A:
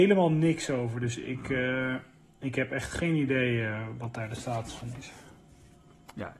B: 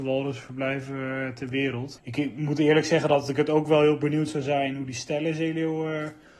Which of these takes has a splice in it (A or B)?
B